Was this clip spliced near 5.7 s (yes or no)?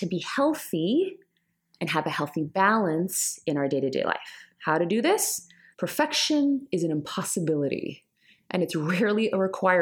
yes